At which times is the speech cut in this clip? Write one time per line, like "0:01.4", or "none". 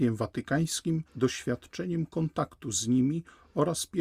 none